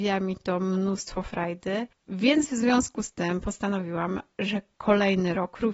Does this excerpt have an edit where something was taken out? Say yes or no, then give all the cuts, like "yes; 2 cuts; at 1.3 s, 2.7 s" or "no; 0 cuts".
no; 0 cuts